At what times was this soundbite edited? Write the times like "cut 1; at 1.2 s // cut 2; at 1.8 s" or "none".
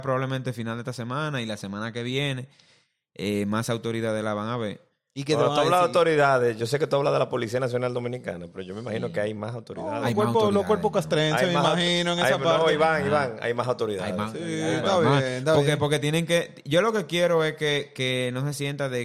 none